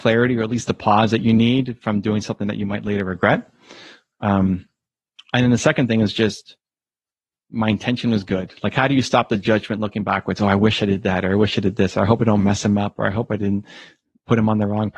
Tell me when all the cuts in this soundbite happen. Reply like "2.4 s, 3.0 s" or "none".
none